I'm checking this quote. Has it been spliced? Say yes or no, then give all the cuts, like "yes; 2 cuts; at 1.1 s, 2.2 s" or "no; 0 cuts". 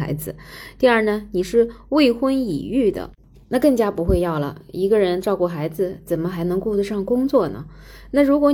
no; 0 cuts